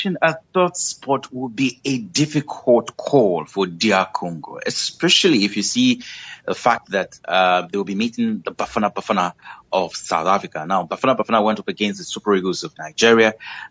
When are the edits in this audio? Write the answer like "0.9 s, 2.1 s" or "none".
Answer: none